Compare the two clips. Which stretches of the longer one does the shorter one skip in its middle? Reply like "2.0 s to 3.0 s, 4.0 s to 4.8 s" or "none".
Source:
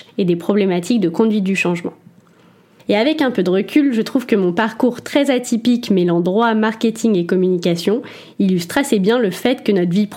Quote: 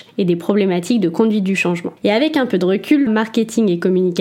2.0 s to 2.8 s, 3.9 s to 6.5 s